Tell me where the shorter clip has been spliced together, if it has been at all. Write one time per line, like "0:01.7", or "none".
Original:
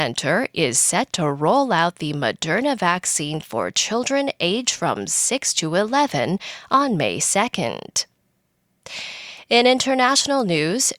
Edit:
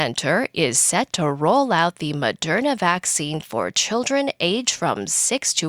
none